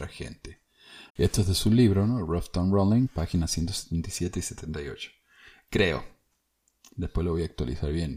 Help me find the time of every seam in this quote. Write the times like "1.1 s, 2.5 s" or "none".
1.1 s